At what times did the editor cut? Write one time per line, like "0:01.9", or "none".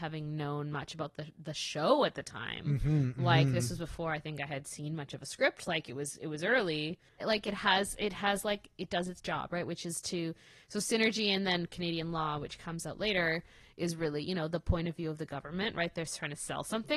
0:07.2